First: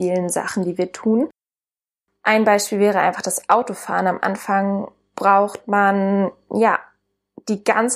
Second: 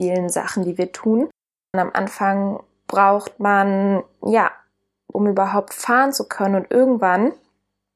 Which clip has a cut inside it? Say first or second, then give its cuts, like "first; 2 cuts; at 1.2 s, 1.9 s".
second; 2 cuts; at 1.7 s, 5.1 s